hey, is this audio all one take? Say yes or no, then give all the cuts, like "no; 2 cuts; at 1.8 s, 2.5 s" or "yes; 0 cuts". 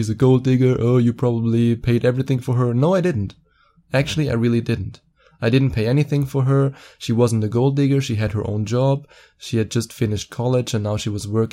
yes; 0 cuts